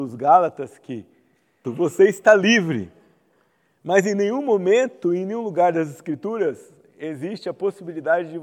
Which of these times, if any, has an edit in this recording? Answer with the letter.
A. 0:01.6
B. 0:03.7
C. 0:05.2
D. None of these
A